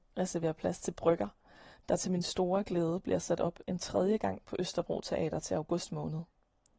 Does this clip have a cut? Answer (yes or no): no